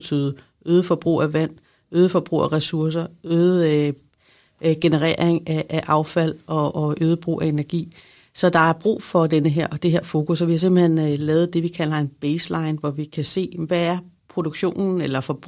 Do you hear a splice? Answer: no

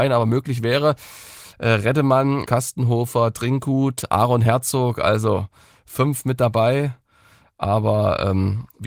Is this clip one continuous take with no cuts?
no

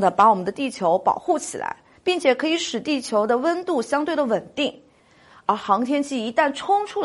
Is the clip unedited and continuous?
no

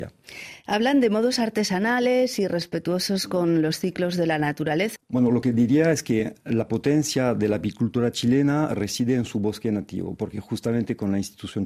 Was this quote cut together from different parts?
yes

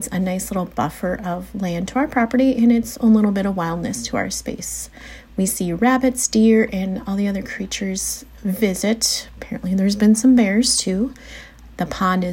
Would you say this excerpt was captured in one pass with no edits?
yes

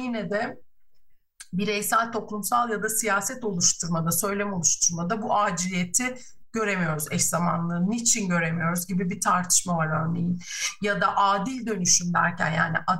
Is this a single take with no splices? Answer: yes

